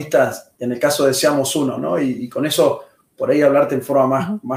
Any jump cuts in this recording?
no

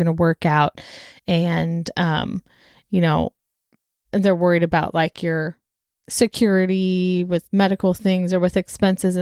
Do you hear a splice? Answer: no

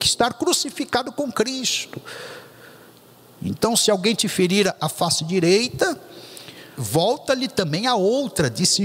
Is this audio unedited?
no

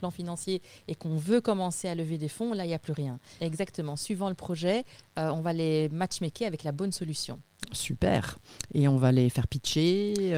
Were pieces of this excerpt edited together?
yes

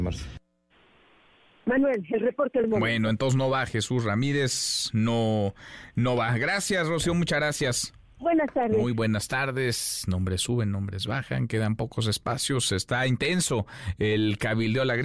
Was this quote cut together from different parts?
no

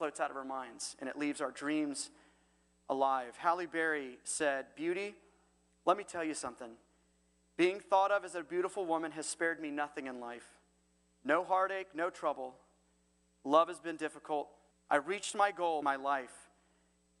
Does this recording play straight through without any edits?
no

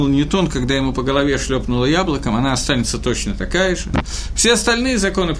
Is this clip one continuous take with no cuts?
yes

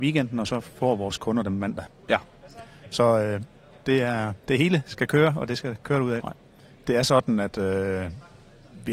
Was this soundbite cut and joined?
yes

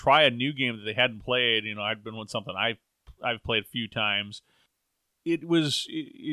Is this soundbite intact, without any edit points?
yes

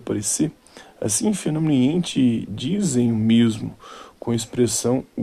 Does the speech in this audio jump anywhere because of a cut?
no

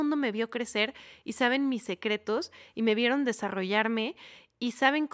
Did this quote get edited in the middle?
no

